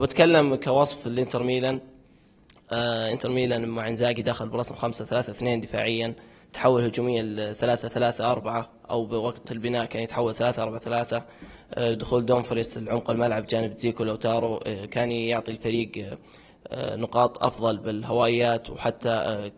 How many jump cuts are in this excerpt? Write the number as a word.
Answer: zero